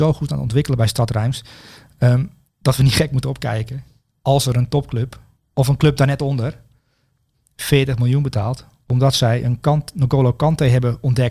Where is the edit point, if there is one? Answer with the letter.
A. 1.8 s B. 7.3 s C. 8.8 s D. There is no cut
B